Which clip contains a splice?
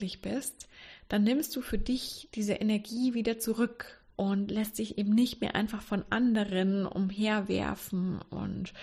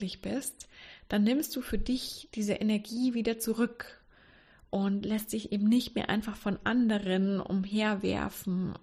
first; 1 cut; at 4.1 s

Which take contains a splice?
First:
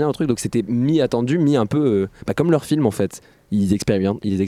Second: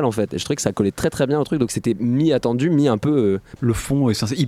second; 1 cut; at 3.6 s

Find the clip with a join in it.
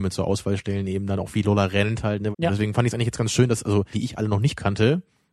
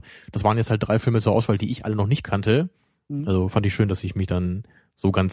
first; 2 cuts; at 2.3 s, 3.9 s

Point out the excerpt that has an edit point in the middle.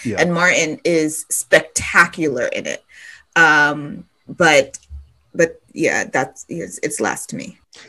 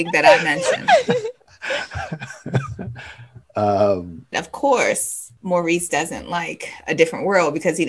second; 1 cut; at 4.3 s

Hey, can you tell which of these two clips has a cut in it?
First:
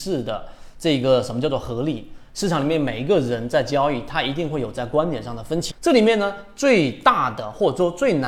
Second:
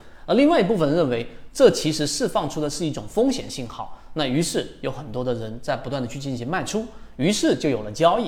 first; 1 cut; at 5.7 s

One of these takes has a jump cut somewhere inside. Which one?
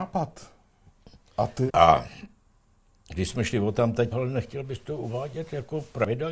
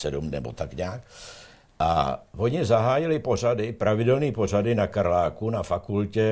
first; 2 cuts; at 1.7 s, 4.1 s

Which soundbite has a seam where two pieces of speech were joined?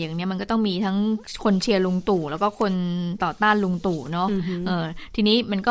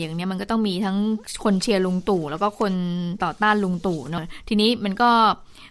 second; 1 cut; at 4.2 s

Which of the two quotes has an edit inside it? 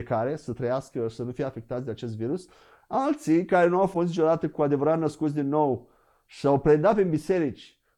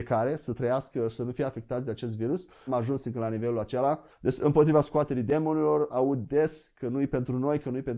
second; 2 cuts; at 2.7 s, 4.1 s

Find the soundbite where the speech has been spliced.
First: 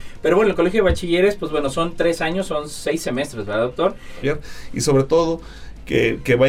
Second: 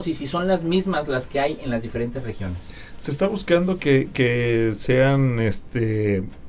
first; 1 cut; at 4.2 s

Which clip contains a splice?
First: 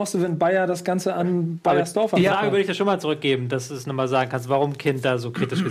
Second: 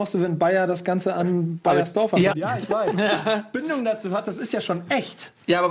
second; 2 cuts; at 2.3 s, 4.2 s

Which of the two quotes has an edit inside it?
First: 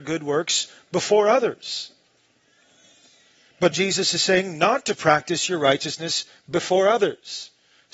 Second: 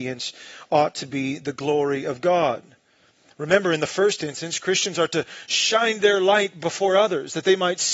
first; 1 cut; at 3.7 s

